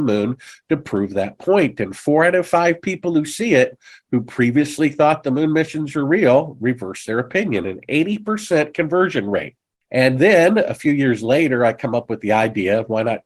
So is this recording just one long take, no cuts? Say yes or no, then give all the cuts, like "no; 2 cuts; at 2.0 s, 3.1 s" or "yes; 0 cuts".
yes; 0 cuts